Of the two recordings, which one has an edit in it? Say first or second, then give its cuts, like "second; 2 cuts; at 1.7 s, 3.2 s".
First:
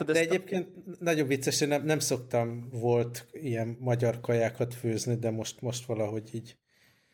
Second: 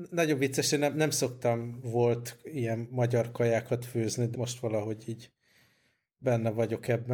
second; 1 cut; at 4.3 s